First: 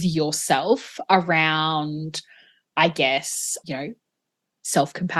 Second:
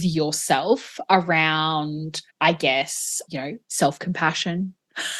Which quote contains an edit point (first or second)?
second